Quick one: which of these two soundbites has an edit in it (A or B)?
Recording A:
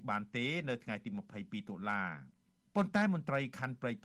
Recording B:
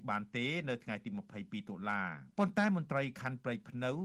B